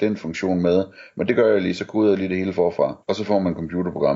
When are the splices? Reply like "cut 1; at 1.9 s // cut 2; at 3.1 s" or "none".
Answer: cut 1; at 3.0 s